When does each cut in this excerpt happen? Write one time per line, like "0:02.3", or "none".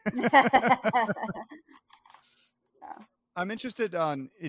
0:02.8